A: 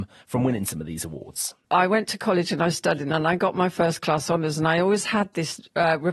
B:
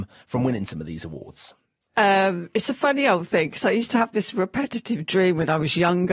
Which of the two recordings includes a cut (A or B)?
A